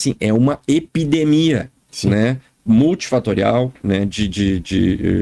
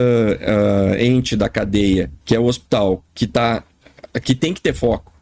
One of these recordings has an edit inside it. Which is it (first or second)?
second